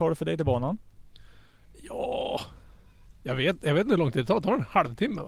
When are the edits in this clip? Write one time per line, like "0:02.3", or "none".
none